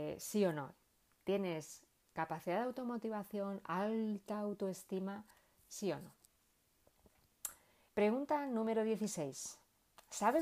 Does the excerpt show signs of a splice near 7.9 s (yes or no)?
yes